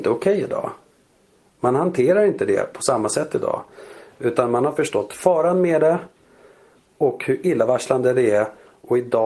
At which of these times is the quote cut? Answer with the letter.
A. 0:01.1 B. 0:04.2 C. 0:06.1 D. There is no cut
D